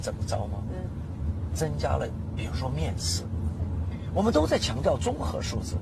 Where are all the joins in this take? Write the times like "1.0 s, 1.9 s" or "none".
none